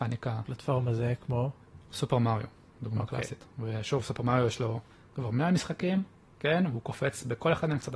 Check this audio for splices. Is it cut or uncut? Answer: uncut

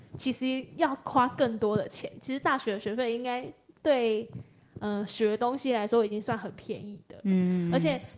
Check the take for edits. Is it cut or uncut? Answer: uncut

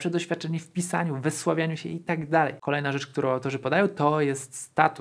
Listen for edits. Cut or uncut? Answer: uncut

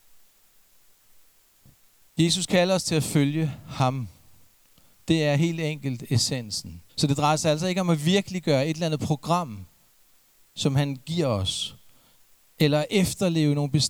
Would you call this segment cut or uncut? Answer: cut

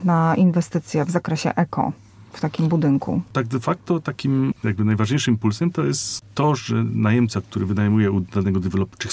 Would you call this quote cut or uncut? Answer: uncut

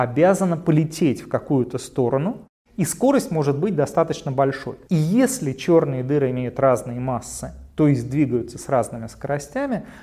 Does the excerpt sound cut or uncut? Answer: cut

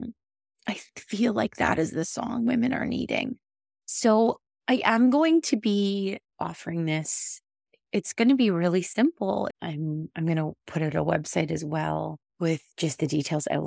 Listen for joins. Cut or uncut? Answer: cut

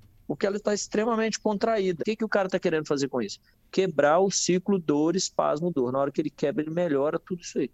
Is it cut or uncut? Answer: cut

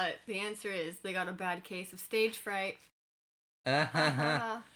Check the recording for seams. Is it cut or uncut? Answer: uncut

